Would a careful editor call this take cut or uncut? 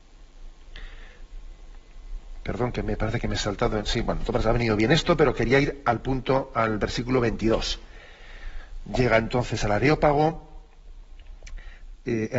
uncut